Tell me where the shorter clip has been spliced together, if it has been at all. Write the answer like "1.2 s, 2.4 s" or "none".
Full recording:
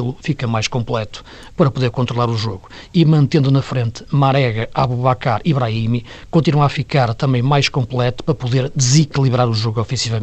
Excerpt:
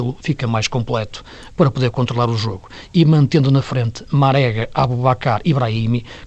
none